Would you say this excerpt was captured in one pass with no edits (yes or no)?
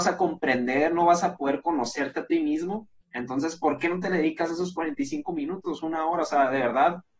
yes